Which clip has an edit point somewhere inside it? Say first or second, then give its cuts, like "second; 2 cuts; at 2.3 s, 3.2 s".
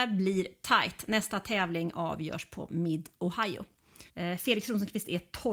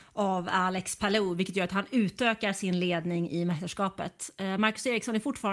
first; 1 cut; at 4.1 s